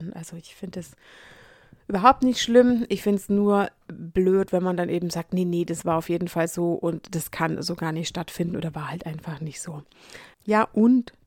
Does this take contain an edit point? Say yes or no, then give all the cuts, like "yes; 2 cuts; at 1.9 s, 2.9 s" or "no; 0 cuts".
yes; 1 cut; at 10.3 s